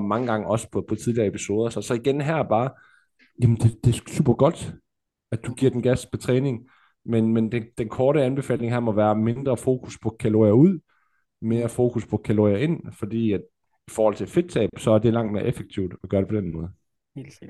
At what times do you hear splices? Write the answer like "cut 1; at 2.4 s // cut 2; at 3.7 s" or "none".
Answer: none